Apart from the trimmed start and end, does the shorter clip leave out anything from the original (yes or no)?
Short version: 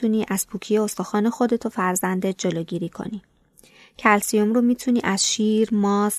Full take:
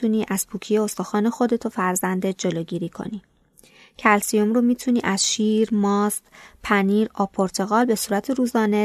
no